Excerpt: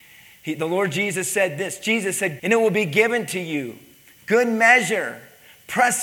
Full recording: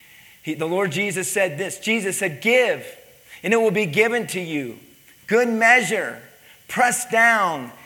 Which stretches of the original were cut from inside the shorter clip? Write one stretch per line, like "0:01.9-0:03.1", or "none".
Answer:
0:02.4-0:03.4